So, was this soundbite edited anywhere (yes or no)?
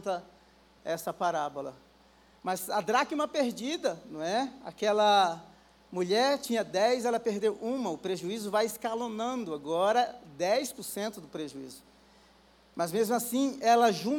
yes